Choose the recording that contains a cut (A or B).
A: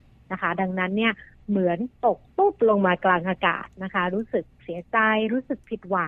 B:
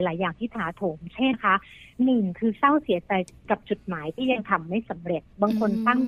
B